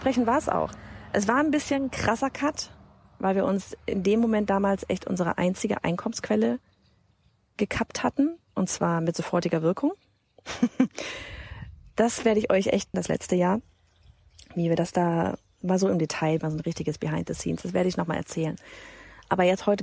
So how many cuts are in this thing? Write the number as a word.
two